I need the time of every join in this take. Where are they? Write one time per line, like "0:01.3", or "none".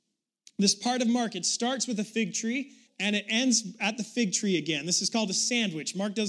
0:02.9